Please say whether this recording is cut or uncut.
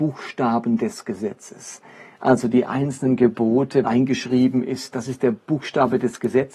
cut